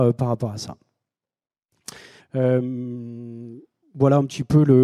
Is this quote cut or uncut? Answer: cut